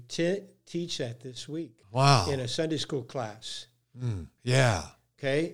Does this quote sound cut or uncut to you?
cut